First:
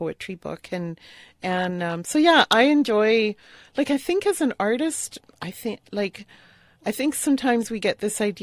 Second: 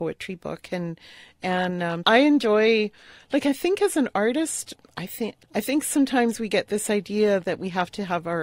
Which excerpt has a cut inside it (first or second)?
second